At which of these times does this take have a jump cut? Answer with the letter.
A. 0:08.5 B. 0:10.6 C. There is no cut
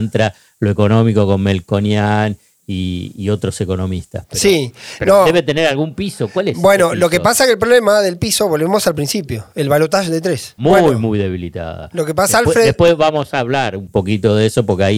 B